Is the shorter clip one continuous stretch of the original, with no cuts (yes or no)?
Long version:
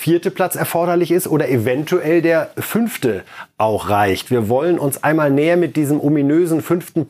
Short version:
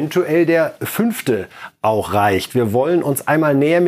yes